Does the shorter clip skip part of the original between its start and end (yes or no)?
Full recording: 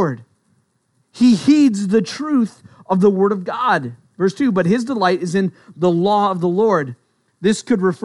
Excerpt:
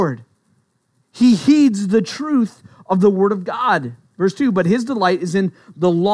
no